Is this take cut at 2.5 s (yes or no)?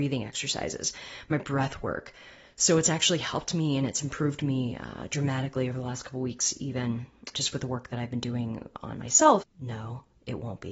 no